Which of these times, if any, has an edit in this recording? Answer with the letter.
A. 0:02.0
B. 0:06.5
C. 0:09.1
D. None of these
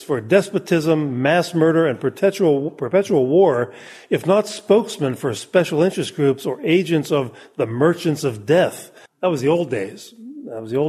C